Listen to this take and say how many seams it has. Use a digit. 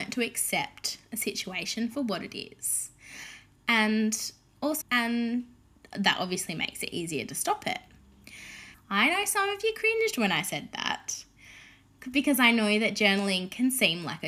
2